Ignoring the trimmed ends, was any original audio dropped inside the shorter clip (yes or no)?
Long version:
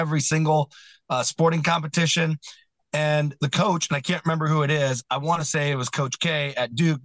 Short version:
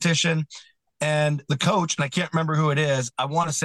no